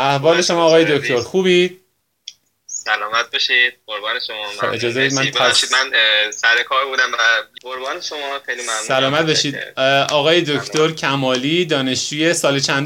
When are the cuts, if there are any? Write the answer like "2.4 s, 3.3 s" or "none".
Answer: 7.6 s